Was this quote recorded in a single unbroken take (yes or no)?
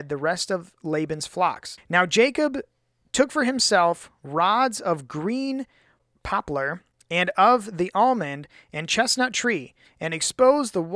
no